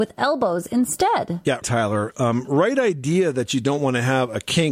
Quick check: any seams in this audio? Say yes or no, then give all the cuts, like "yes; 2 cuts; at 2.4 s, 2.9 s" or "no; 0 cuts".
yes; 1 cut; at 1.6 s